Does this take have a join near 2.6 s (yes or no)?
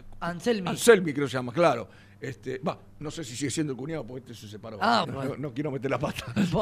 no